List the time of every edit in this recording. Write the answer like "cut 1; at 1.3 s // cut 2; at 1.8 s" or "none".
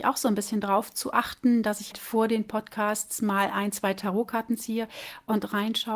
cut 1; at 1.9 s